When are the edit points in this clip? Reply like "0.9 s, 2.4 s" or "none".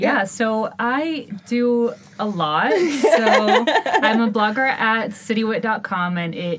none